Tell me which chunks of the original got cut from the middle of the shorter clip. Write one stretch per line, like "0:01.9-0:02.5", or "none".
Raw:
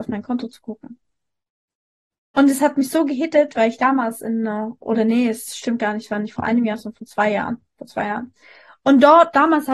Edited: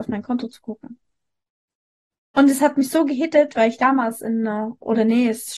none

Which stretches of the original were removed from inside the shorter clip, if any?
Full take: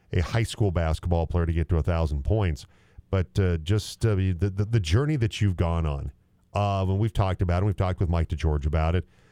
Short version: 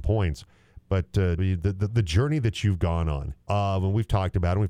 0:03.6-0:04.2
0:06.2-0:06.5

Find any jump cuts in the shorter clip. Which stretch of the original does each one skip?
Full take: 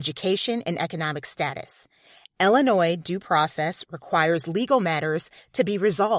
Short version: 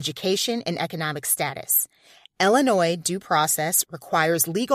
none

